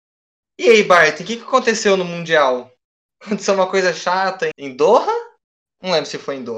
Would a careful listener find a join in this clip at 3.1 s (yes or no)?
no